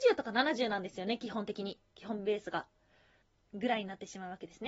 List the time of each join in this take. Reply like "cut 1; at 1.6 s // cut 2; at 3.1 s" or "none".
cut 1; at 3.2 s